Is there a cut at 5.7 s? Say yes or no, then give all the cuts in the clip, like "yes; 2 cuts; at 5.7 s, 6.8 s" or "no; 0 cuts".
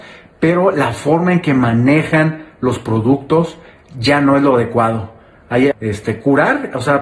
yes; 1 cut; at 5.7 s